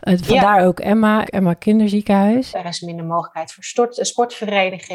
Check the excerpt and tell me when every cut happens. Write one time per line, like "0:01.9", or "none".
0:01.2
0:02.5